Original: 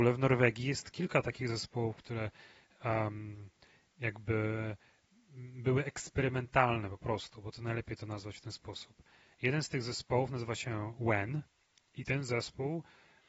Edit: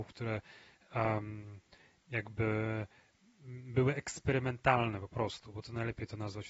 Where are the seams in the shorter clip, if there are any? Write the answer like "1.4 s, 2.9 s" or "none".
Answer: none